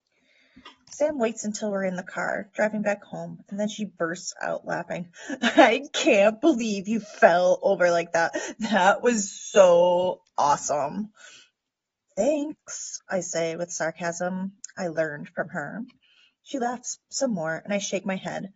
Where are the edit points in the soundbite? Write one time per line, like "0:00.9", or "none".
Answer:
none